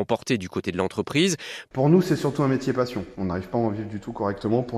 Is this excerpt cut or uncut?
cut